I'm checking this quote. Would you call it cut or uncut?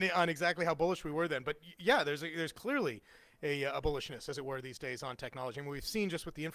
uncut